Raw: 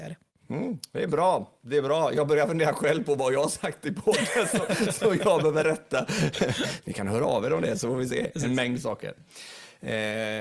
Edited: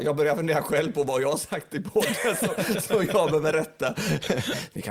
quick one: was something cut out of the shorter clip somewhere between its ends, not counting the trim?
no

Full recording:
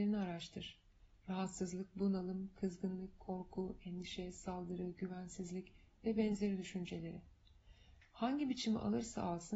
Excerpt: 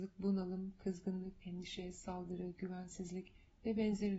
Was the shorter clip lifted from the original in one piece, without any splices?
no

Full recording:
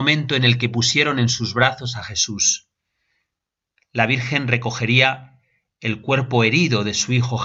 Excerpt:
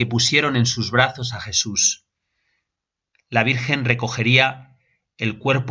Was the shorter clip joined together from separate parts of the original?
no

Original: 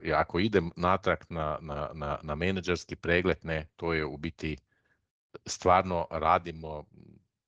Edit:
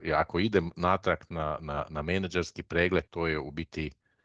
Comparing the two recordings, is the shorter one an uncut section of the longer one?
no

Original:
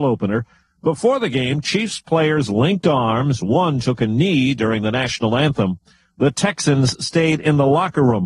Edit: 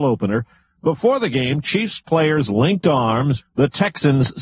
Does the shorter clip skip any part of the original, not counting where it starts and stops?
yes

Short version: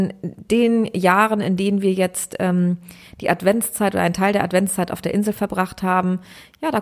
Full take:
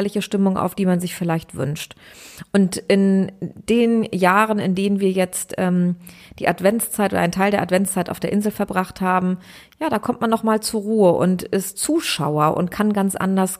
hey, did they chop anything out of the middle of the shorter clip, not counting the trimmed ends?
no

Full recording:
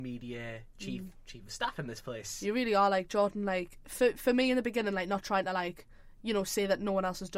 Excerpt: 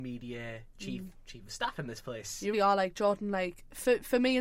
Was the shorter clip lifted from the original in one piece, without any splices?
no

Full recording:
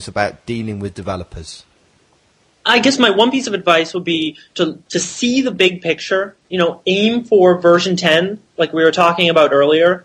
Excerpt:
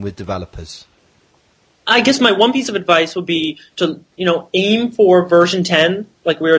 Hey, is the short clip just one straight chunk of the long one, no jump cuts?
no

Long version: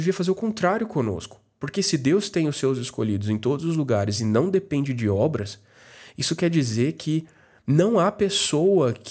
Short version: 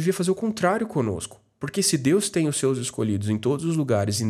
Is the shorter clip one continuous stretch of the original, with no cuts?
yes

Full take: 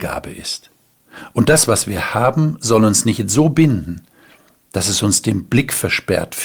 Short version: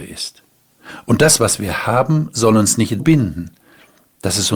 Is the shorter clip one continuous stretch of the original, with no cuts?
no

